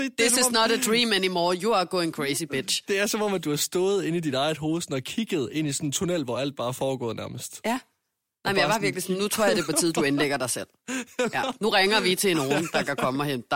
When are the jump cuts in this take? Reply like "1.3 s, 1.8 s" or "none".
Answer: none